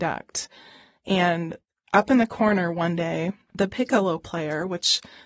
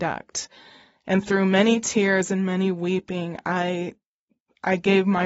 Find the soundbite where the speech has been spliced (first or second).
second